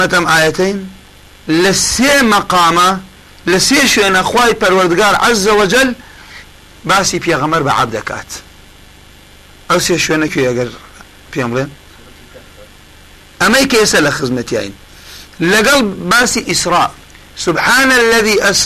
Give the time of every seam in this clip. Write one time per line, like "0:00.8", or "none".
0:10.3